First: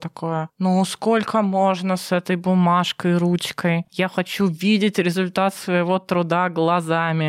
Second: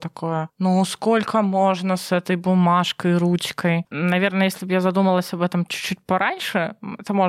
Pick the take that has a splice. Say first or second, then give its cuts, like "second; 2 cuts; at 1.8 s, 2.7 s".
second; 1 cut; at 3.9 s